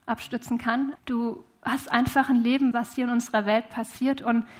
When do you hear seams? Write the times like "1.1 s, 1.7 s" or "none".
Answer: 1.0 s, 2.7 s